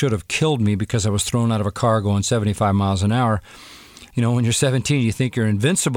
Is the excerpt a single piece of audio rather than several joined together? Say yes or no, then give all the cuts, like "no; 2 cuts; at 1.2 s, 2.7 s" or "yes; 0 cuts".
no; 1 cut; at 4.1 s